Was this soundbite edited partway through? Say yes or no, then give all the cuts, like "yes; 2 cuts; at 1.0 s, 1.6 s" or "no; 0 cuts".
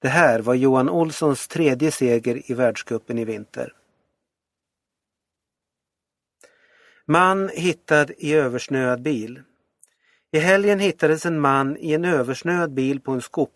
no; 0 cuts